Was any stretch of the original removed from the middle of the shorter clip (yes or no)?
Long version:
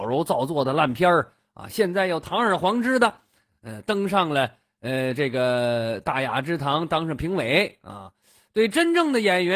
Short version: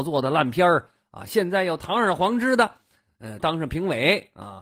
yes